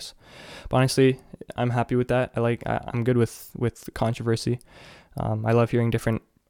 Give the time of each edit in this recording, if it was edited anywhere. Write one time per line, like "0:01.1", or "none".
0:03.9

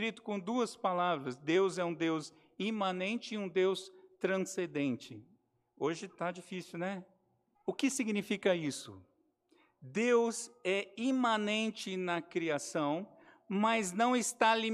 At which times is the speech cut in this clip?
0:07.5

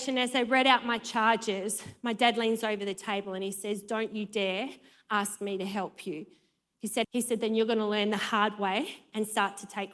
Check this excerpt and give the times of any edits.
0:07.0

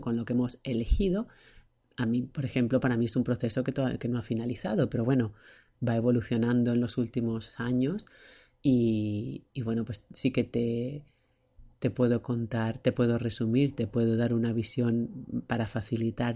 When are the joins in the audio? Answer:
0:01.7

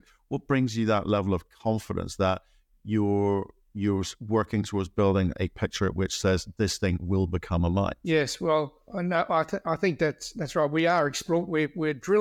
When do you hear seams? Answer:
none

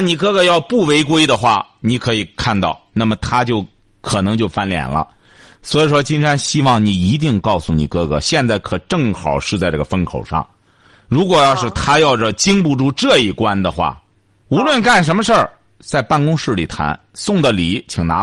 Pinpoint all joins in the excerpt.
0:14.4

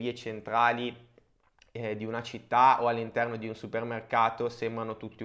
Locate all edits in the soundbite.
none

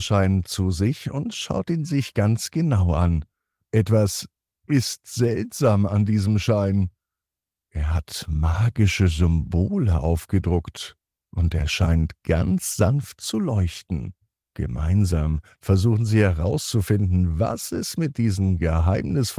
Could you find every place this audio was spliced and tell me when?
0:14.4

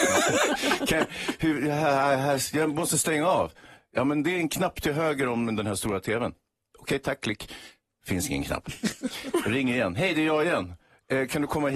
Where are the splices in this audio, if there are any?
none

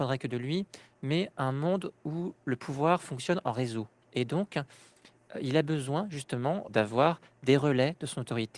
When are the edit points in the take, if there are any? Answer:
0:04.0
0:06.7

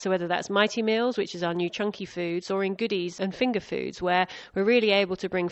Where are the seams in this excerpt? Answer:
none

